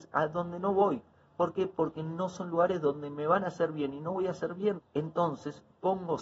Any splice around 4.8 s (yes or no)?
yes